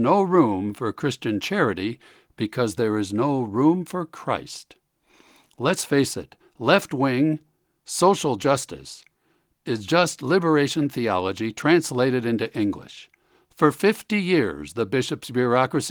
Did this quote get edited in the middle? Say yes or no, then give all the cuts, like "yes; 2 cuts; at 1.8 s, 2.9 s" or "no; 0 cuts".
no; 0 cuts